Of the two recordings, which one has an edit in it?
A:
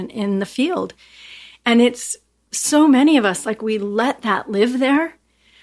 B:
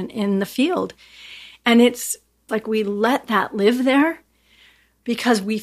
B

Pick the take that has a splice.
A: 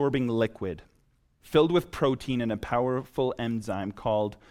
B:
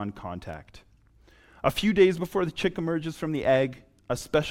A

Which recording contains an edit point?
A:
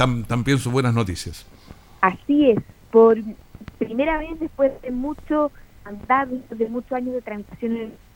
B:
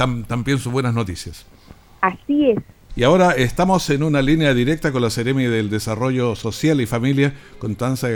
B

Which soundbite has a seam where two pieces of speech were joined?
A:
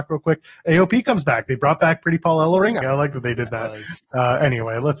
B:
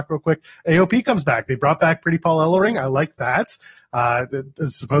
A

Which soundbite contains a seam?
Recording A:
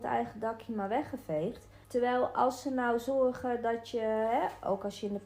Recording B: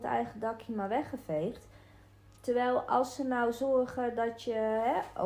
A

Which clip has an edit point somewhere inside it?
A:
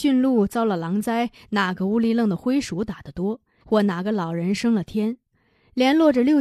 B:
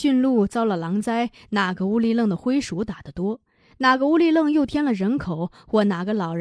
A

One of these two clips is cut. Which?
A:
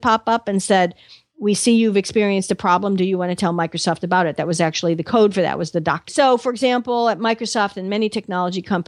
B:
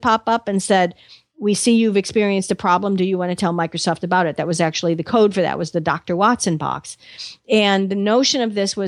A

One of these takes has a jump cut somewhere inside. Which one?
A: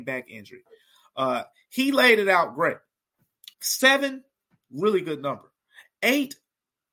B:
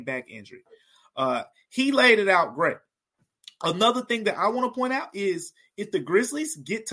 A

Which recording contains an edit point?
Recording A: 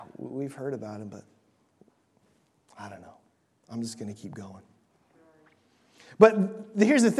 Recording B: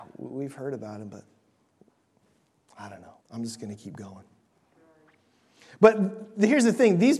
B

